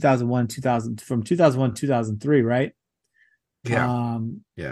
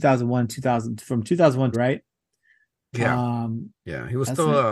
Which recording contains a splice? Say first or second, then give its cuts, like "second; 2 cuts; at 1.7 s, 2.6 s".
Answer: second; 1 cut; at 1.7 s